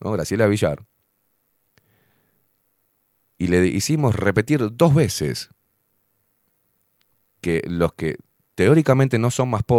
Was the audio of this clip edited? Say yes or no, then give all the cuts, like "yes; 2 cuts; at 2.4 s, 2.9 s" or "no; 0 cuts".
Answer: no; 0 cuts